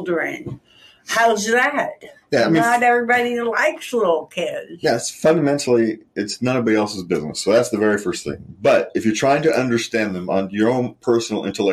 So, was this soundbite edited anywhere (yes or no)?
no